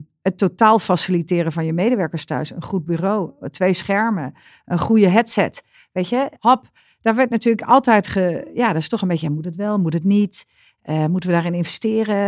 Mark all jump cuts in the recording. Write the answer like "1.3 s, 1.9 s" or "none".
6.4 s